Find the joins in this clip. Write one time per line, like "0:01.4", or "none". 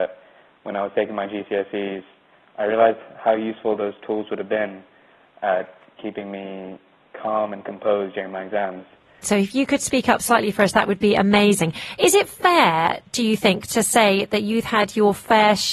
0:06.0
0:09.2

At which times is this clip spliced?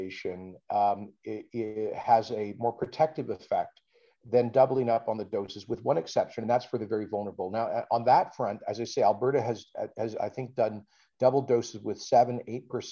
none

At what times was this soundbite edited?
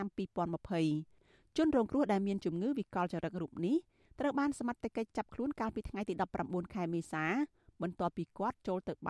none

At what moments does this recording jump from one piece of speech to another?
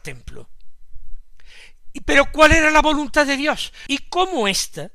0:03.9

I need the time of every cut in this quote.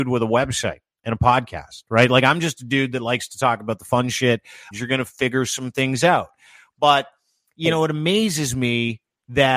0:04.7

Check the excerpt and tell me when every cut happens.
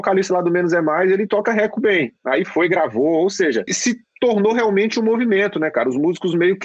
0:03.7

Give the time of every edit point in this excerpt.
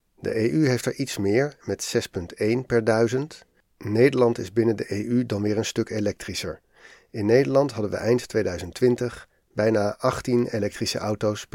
none

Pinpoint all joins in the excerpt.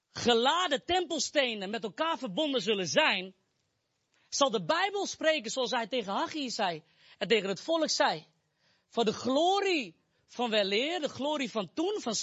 none

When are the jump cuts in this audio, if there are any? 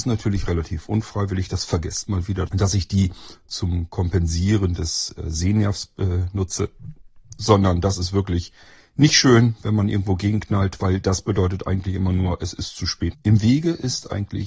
0:02.5
0:13.1

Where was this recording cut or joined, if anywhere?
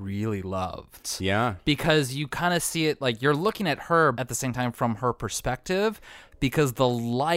0:04.1

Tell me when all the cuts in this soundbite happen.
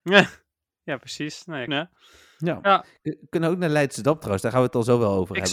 0:01.7

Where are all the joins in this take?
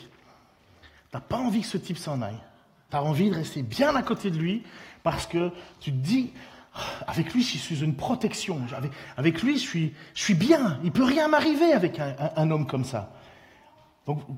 none

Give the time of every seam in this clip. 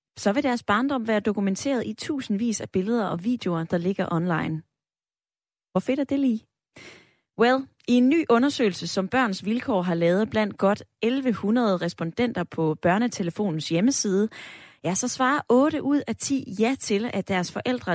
none

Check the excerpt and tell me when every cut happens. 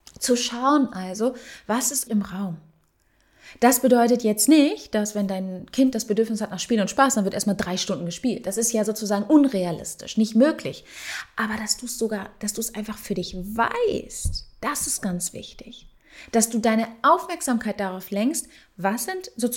0:02.1

